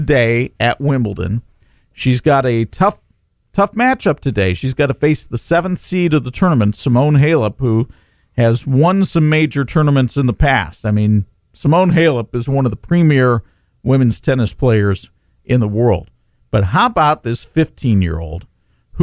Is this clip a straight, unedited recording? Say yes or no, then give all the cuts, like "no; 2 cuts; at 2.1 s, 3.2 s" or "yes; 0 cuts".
yes; 0 cuts